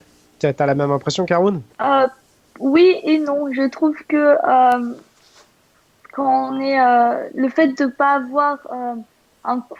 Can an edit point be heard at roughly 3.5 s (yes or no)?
no